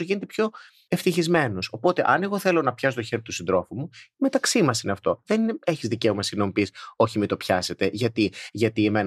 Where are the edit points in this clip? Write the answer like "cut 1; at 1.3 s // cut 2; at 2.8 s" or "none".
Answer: none